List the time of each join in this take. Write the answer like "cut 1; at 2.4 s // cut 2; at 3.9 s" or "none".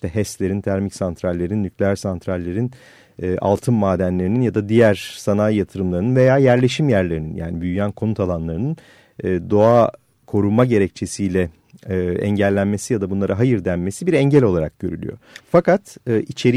cut 1; at 15.4 s